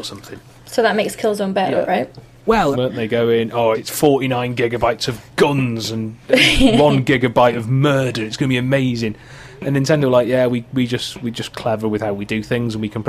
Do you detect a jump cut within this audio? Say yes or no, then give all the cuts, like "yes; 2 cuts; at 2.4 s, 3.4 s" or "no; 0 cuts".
yes; 2 cuts; at 2.7 s, 3.7 s